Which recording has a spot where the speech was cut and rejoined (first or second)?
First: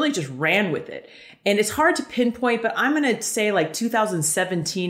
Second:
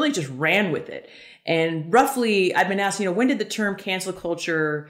first